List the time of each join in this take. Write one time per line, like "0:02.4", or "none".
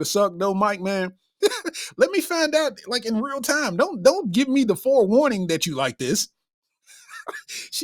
0:01.4